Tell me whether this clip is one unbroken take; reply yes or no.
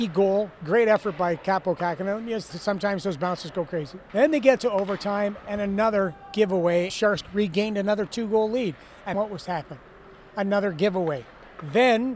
no